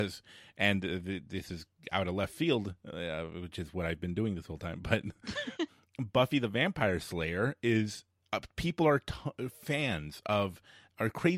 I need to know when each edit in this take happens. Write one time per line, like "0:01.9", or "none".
0:05.7